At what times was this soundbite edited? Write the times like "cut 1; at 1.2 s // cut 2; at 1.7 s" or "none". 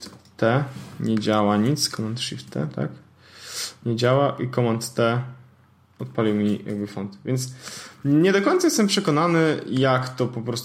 none